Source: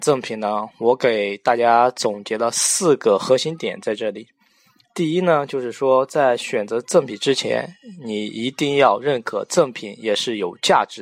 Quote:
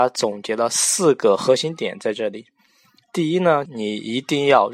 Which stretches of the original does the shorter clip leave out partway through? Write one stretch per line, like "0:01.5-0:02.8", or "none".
0:05.5-0:08.0